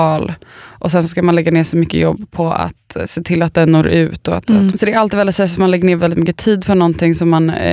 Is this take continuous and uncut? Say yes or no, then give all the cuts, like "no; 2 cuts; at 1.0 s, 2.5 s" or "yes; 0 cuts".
no; 2 cuts; at 4.7 s, 6.0 s